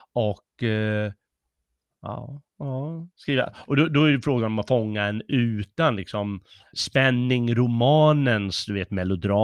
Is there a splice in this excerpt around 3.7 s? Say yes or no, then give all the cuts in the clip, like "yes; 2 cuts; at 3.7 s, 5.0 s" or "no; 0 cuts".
no; 1 cut; at 6.7 s